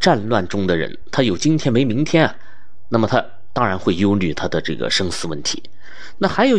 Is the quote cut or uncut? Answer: uncut